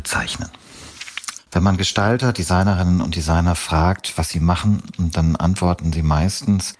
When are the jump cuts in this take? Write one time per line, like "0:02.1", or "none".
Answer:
0:01.4